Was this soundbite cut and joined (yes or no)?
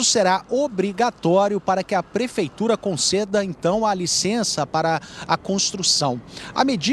no